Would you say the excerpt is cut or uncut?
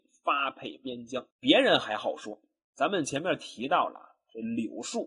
cut